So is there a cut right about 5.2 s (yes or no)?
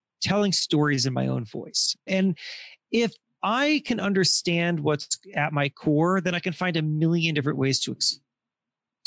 no